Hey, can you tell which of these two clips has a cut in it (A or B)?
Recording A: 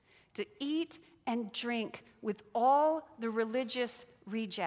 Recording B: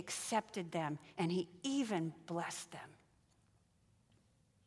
B